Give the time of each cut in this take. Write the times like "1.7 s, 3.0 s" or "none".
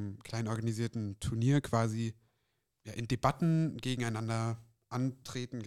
none